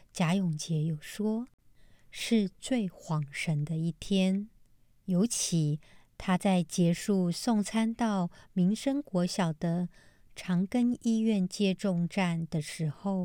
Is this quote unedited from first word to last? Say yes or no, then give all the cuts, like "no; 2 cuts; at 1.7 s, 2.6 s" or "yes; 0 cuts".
yes; 0 cuts